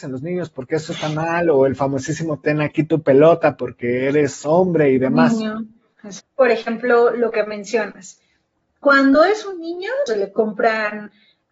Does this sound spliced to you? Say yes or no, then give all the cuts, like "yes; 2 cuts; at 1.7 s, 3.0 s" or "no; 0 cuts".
yes; 2 cuts; at 6.2 s, 10.1 s